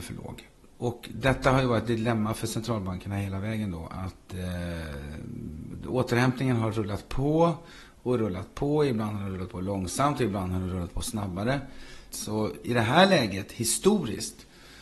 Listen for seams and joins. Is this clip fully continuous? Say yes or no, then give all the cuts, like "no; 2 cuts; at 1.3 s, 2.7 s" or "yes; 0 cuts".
no; 1 cut; at 12.1 s